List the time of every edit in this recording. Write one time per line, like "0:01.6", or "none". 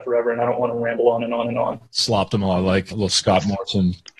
0:01.9
0:02.9

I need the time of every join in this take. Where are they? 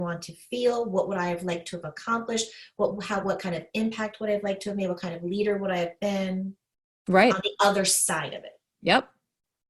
none

